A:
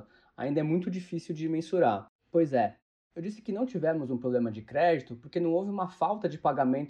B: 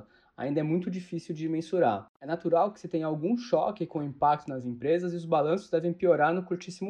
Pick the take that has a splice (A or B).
A